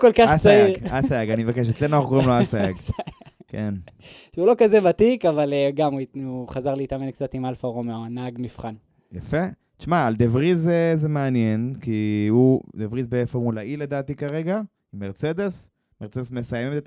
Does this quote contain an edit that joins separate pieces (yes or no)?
no